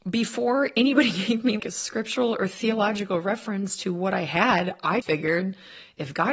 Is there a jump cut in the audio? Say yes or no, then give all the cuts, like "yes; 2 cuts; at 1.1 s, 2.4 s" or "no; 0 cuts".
yes; 2 cuts; at 1.6 s, 5.0 s